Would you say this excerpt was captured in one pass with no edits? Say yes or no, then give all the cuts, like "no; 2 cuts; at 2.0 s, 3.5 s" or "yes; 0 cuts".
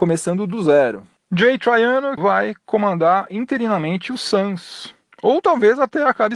no; 1 cut; at 2.2 s